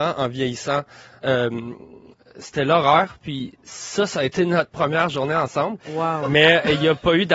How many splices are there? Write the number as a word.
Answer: one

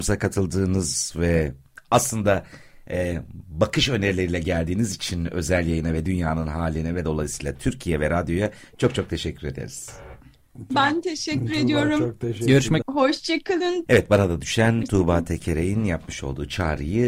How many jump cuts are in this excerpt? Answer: two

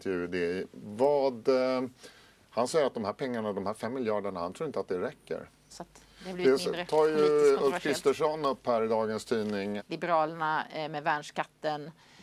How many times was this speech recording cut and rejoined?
two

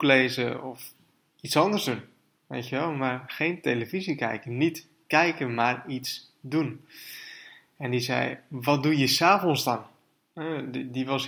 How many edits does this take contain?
one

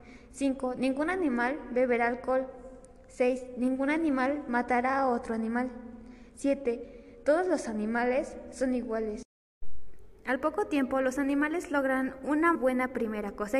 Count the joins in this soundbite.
one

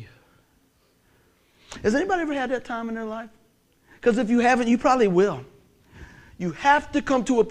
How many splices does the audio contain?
zero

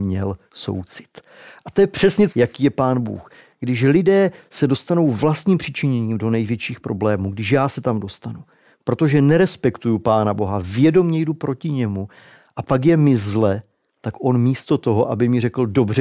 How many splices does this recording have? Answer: one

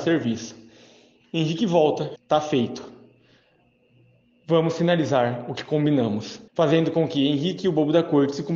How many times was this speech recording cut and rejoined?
two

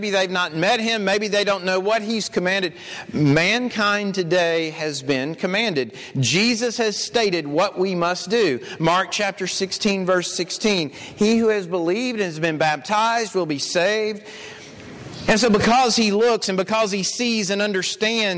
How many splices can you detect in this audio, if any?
one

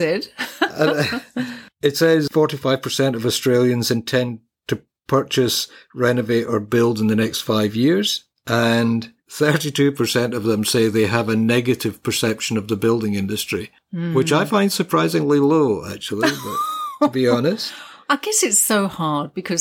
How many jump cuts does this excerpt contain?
zero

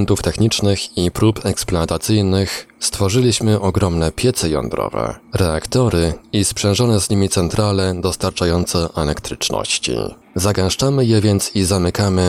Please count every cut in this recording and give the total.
one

